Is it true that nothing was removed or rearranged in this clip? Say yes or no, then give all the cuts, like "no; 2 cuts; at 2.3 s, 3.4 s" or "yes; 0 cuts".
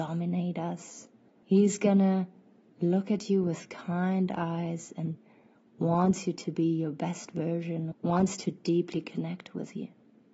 no; 2 cuts; at 1.4 s, 7.9 s